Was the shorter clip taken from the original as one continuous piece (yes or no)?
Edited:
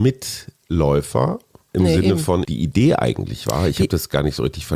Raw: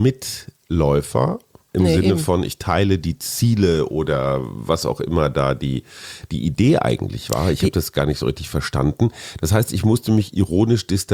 no